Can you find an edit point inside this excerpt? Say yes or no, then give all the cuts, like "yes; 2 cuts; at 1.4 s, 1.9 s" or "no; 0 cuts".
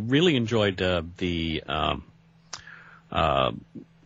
no; 0 cuts